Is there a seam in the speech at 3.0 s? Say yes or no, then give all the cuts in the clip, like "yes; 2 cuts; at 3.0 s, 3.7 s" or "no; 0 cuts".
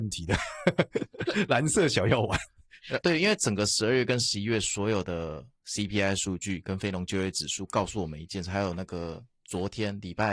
yes; 1 cut; at 3.0 s